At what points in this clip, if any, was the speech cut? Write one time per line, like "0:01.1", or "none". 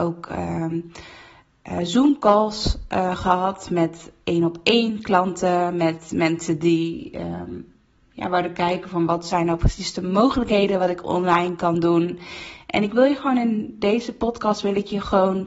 none